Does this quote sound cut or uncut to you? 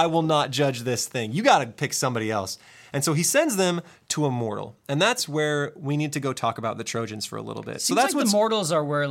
uncut